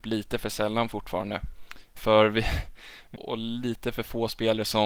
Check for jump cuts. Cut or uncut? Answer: cut